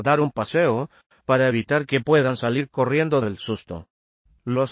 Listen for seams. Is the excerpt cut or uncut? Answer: cut